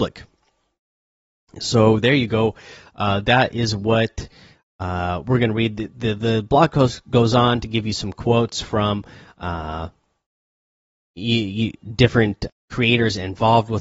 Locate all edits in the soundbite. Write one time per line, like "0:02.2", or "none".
0:12.5